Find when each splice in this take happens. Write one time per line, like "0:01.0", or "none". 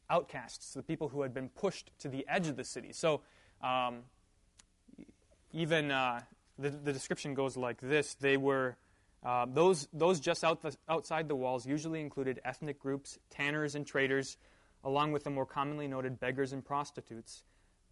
none